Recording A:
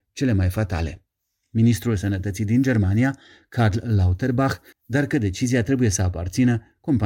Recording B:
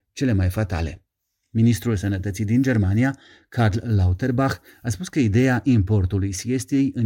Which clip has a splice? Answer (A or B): A